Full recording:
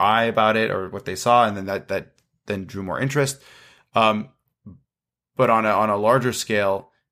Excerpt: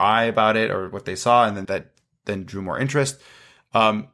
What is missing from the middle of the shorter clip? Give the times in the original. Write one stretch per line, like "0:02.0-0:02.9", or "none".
0:01.6-0:01.9